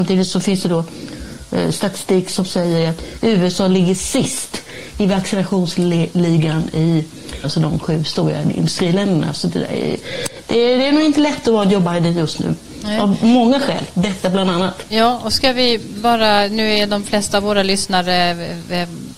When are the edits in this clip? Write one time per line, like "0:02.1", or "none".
0:07.4

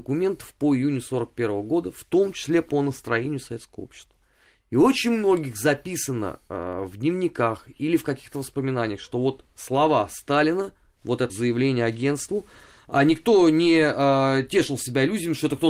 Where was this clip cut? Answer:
0:11.3

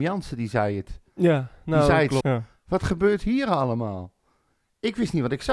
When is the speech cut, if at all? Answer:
0:02.2

